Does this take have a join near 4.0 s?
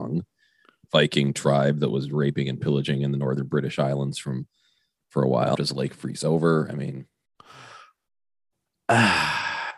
no; 1 cut; at 5.5 s

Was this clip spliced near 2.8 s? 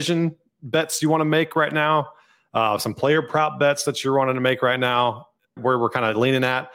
no; 1 cut; at 5.6 s

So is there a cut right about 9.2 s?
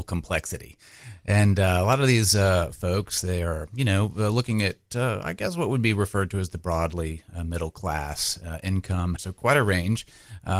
yes; 1 cut; at 9.2 s

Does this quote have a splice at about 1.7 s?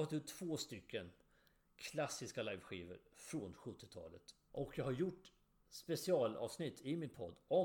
no; 1 cut; at 4.5 s

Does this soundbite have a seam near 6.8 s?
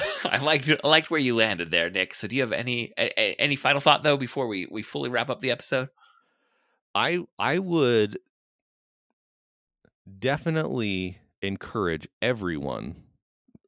no; 0 cuts

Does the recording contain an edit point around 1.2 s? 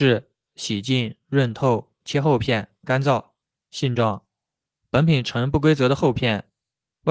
no; 0 cuts

